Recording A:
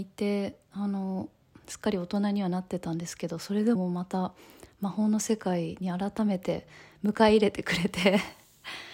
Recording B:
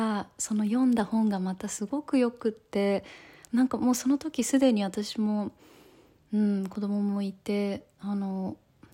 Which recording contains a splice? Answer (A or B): A